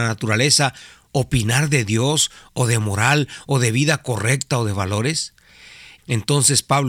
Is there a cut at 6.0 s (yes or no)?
yes